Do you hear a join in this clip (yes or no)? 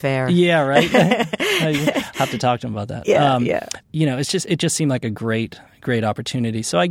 no